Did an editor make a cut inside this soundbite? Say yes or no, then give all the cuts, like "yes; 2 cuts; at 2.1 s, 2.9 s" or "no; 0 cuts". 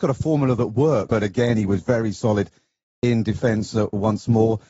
yes; 1 cut; at 1.1 s